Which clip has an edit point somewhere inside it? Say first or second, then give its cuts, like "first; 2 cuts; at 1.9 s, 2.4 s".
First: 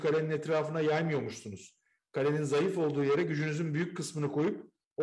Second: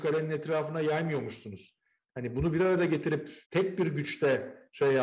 second; 2 cuts; at 2.0 s, 3.5 s